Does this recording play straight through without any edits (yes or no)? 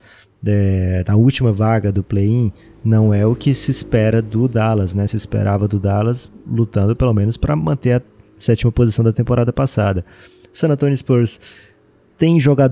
yes